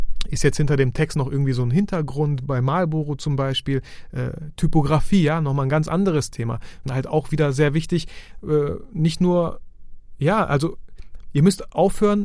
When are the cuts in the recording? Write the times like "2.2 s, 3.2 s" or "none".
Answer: 6.8 s